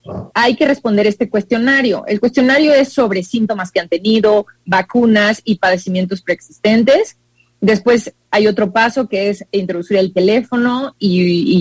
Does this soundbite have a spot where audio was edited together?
no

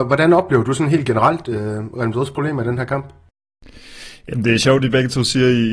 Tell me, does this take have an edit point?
no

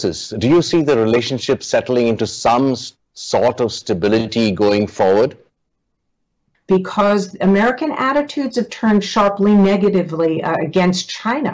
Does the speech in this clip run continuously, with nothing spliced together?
no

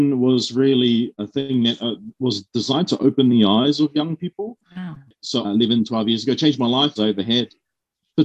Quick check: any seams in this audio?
yes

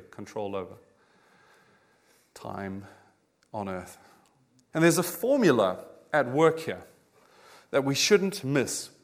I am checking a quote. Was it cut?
yes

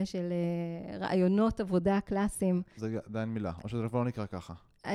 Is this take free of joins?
no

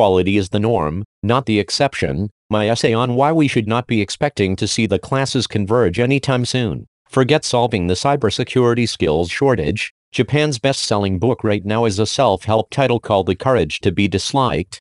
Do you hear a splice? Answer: yes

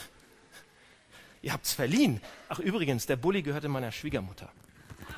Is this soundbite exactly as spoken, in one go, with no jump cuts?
yes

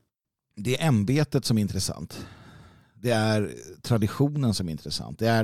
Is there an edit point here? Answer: no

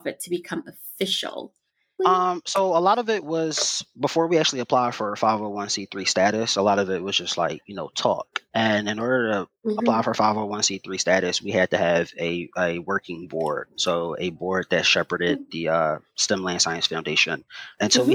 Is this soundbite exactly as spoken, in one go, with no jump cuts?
no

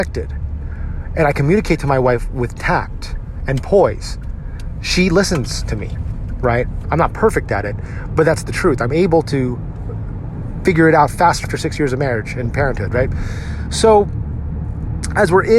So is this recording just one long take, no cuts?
no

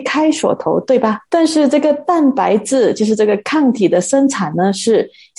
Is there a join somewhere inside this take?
yes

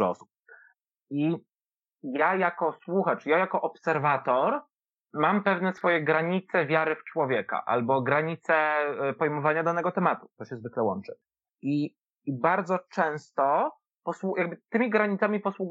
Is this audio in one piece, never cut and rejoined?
yes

